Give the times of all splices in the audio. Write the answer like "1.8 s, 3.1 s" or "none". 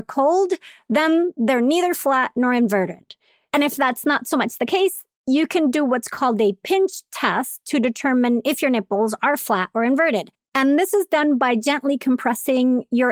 none

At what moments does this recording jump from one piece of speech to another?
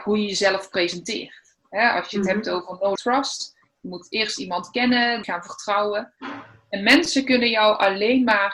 3.0 s, 5.2 s

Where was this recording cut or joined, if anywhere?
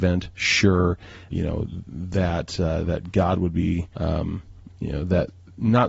1.3 s, 3.9 s

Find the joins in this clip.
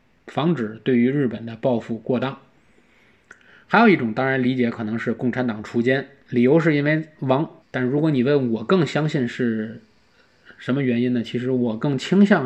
7.6 s

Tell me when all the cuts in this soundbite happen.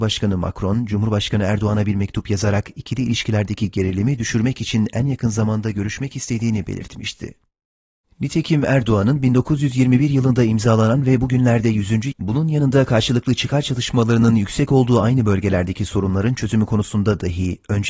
8.0 s, 12.1 s

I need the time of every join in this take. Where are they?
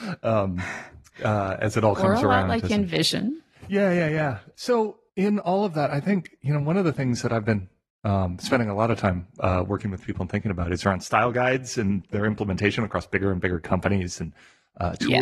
5.1 s

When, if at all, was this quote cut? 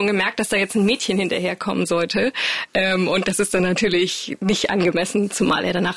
none

